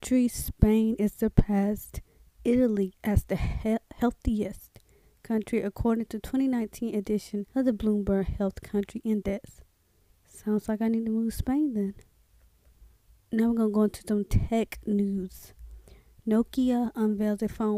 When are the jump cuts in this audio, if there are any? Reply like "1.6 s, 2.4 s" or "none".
7.5 s